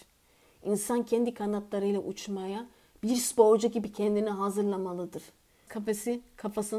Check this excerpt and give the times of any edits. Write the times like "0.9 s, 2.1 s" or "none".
5.7 s

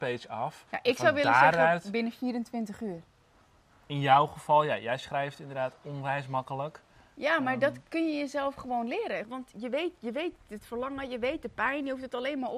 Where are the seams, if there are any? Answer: 9.2 s

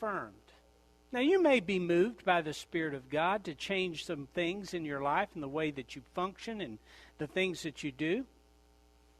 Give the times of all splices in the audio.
none

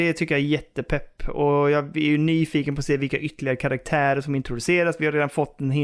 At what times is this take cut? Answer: none

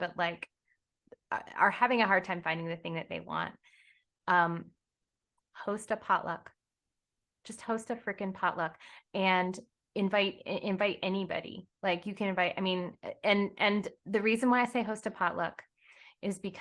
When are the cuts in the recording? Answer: none

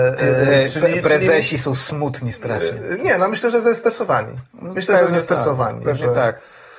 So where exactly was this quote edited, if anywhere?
none

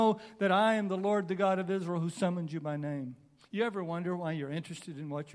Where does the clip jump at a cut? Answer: none

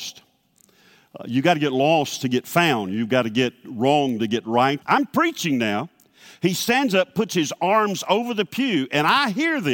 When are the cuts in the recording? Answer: 4.8 s

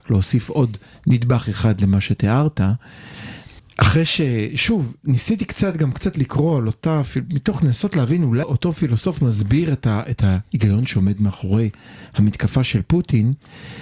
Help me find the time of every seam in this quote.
3.6 s, 8.4 s

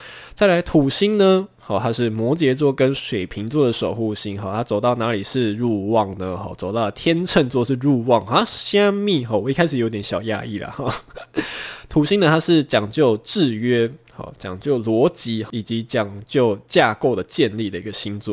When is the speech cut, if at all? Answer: none

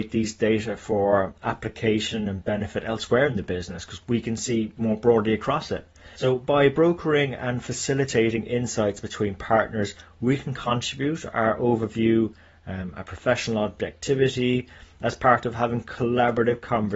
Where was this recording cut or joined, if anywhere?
6.2 s

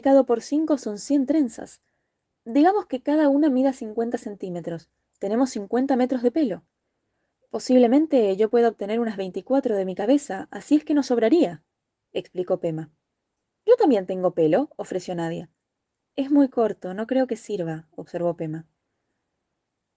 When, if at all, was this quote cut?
none

